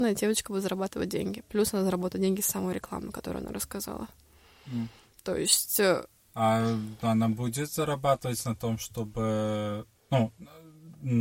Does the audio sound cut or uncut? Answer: uncut